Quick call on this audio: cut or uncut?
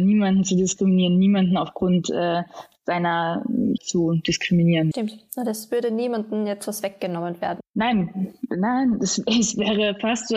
cut